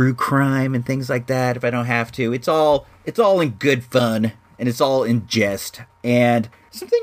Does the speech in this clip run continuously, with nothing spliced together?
yes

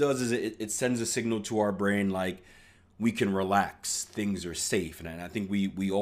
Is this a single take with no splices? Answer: yes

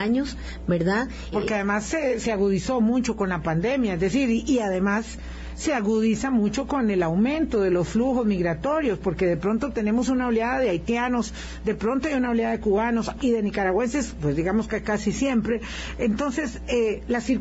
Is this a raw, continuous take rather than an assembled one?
no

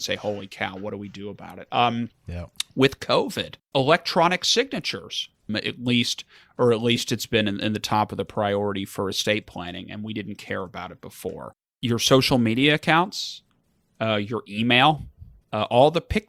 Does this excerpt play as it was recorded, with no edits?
no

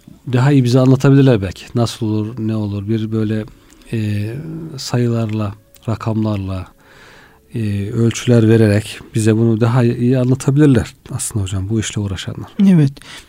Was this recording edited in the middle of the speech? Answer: no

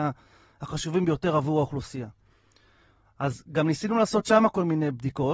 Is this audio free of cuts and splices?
yes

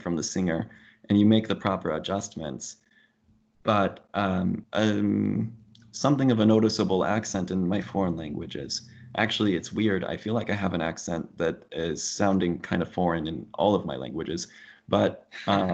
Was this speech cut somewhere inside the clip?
yes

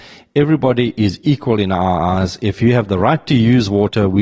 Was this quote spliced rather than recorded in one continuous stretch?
no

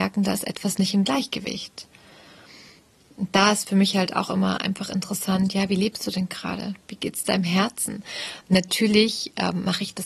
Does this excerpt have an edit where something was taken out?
yes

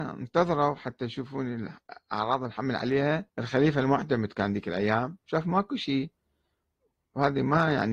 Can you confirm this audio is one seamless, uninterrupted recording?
no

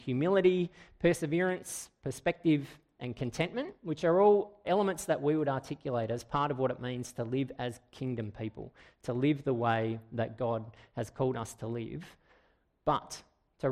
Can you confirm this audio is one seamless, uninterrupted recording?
no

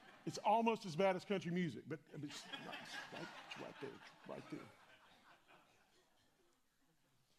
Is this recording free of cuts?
yes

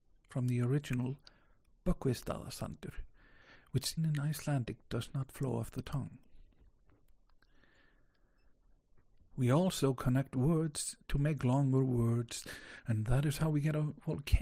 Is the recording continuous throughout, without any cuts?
no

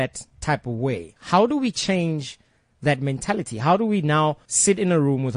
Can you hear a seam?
yes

